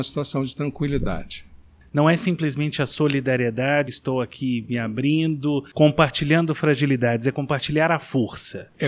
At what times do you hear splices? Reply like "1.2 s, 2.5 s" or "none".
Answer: 3.9 s